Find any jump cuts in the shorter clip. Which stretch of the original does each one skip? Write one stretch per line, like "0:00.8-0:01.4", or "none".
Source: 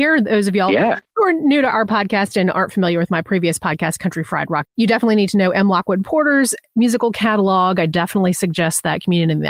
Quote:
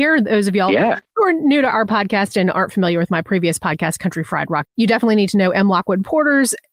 none